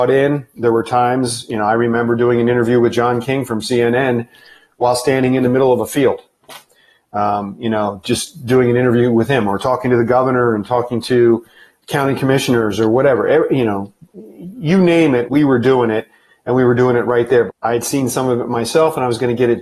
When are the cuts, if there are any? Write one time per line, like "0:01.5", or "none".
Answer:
0:11.8
0:15.3
0:17.5